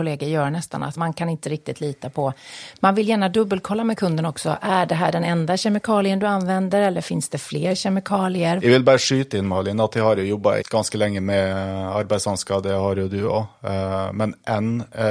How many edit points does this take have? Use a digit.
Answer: 2